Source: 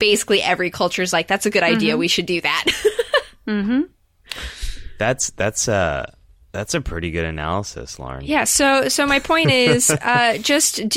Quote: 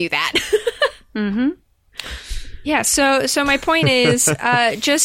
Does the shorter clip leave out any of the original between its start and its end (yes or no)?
yes